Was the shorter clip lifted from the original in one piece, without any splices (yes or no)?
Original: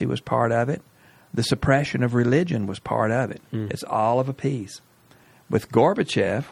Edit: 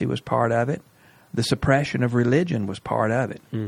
yes